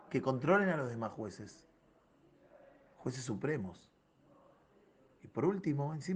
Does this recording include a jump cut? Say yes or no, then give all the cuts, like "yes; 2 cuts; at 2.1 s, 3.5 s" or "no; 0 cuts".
no; 0 cuts